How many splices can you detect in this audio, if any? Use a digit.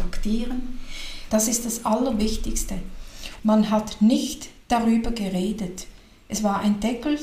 2